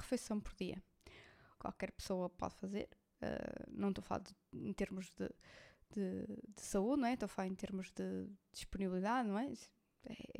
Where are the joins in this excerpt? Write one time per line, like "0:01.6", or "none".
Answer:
0:01.6